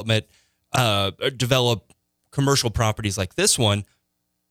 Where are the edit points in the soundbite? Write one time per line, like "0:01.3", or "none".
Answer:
none

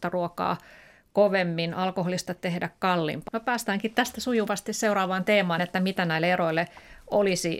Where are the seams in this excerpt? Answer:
0:03.3
0:05.6

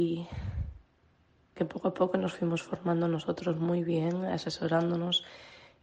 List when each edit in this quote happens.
0:01.6

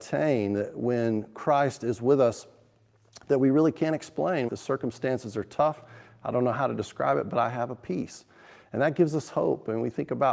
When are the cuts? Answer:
0:04.5

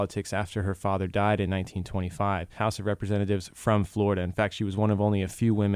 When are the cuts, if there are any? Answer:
0:02.6

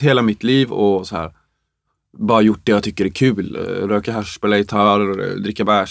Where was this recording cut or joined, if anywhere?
none

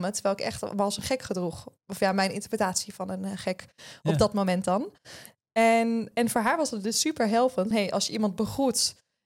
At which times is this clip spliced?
0:06.1
0:07.7

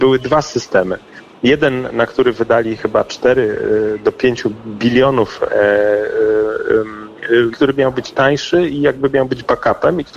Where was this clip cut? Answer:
0:05.5
0:07.5

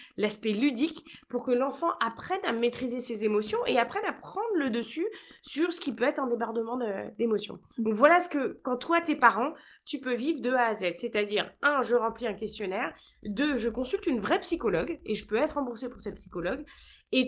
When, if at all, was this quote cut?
none

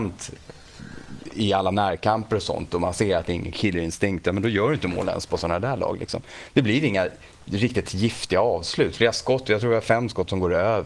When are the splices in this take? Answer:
none

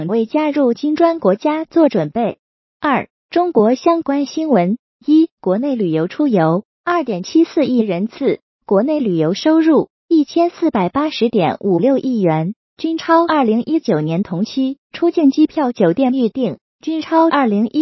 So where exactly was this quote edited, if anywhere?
0:05.3
0:14.8

